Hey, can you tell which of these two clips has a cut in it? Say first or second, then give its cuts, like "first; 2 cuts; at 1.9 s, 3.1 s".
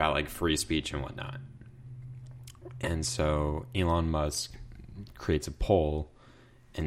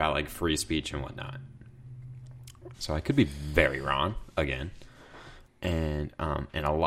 second; 2 cuts; at 2.7 s, 5.5 s